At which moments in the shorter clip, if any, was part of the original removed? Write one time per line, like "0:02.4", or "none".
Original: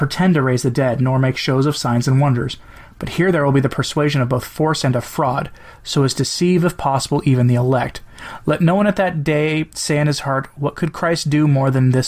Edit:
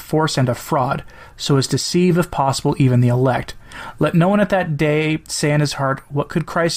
none